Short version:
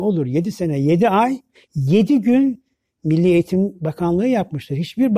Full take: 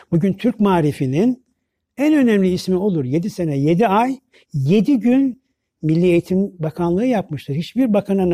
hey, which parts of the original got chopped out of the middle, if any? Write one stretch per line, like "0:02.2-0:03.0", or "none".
none